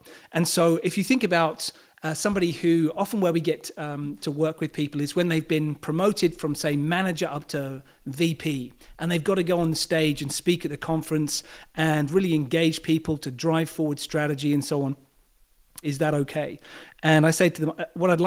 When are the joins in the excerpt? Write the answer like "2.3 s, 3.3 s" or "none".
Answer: 15.8 s